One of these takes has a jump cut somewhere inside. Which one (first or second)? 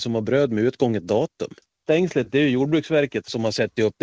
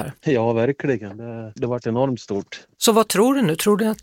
second